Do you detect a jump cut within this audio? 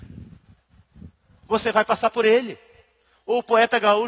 yes; 1 cut; at 1.5 s

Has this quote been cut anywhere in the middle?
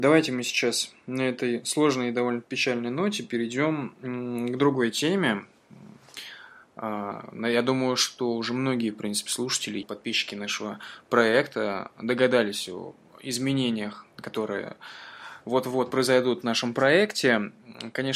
yes; 2 cuts; at 9.8 s, 14.1 s

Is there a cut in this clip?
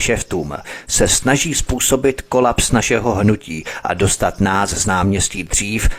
no; 0 cuts

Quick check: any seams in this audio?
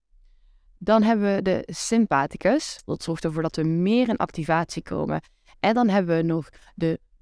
yes; 1 cut; at 2.9 s

